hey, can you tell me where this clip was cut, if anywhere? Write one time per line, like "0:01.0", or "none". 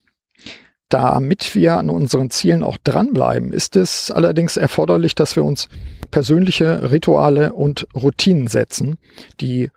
none